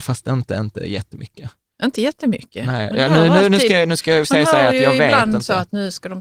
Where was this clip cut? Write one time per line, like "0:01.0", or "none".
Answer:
none